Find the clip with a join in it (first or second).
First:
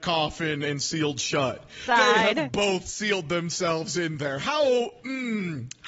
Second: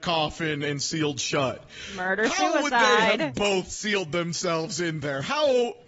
first